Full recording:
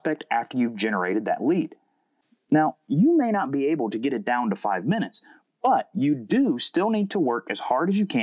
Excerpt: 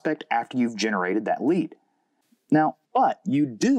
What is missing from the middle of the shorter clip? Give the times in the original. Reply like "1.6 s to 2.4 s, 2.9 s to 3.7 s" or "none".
2.8 s to 5.5 s